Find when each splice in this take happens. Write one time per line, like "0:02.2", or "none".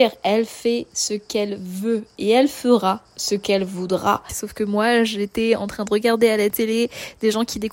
0:04.3